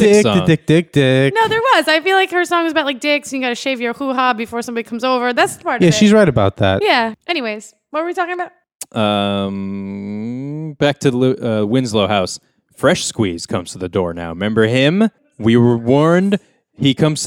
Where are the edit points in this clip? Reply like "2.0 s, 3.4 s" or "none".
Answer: none